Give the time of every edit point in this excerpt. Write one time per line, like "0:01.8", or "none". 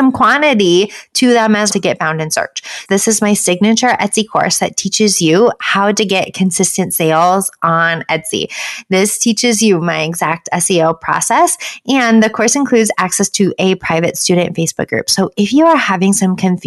0:01.7
0:02.9